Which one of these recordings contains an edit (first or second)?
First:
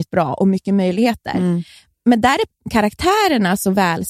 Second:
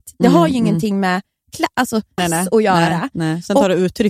second